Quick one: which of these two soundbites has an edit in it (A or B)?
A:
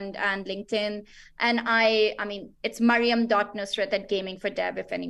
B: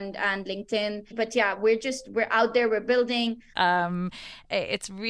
B